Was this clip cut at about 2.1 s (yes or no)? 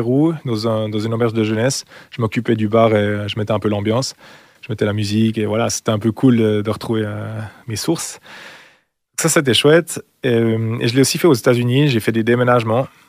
no